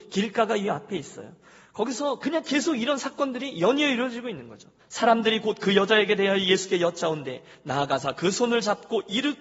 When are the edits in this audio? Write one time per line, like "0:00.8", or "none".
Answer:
0:04.8